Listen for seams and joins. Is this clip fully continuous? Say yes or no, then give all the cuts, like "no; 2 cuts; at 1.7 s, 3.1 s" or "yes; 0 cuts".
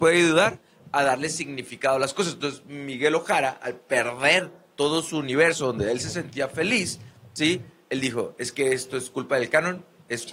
yes; 0 cuts